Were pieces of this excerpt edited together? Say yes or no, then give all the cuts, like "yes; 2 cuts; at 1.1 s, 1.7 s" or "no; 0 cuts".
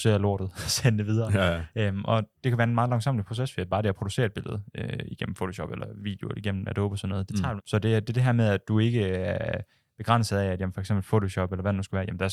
yes; 1 cut; at 7.6 s